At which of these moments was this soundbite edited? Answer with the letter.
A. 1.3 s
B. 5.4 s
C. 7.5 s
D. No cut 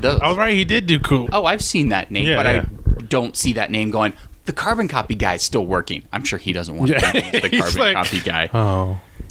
A